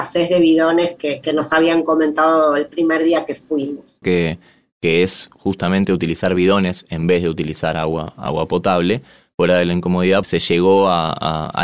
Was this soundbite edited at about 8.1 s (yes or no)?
no